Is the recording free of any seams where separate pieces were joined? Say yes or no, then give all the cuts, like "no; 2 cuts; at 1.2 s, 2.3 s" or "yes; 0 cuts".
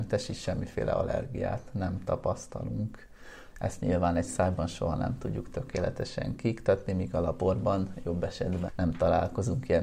no; 2 cuts; at 3.5 s, 8.7 s